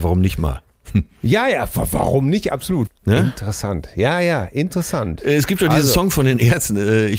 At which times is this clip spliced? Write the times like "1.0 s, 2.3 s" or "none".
2.9 s